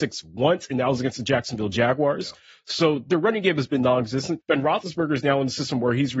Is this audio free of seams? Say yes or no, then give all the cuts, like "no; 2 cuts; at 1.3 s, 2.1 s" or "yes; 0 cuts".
no; 1 cut; at 4.4 s